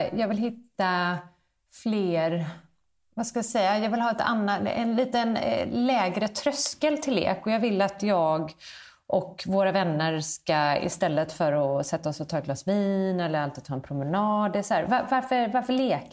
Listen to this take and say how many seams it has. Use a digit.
0